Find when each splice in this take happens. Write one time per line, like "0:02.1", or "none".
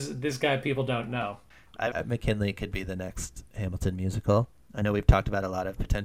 0:01.9
0:03.5